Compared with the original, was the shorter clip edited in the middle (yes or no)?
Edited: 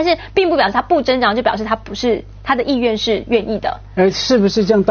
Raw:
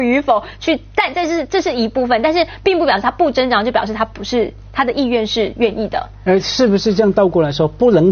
no